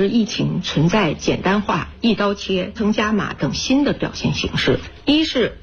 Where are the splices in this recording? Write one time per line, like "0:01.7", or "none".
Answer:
0:02.8